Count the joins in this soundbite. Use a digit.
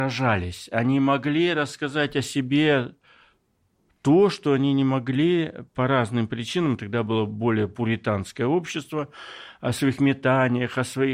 0